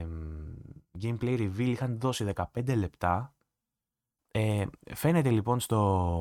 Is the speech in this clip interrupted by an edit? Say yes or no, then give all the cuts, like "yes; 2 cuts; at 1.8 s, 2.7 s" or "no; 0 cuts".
yes; 1 cut; at 4.2 s